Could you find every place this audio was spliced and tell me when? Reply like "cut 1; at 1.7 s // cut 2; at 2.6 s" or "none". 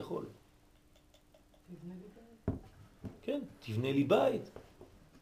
none